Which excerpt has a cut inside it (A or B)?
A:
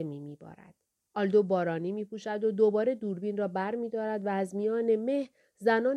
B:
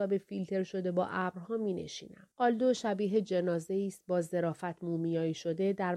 B